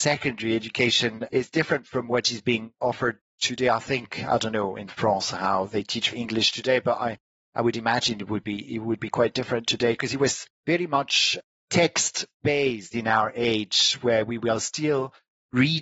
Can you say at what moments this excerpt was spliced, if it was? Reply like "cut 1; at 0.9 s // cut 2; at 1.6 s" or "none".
none